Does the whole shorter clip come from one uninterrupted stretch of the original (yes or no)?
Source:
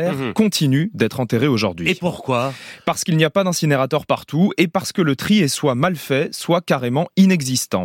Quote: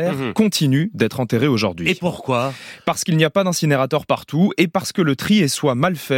yes